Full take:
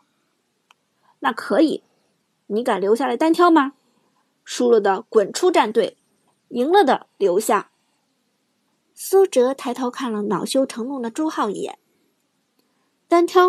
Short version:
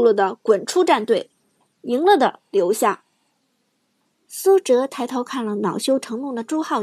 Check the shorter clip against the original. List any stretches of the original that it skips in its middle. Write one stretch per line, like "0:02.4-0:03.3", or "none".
none